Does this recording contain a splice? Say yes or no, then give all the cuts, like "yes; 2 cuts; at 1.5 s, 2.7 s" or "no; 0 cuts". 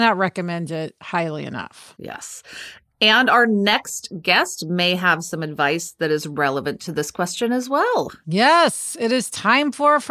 no; 0 cuts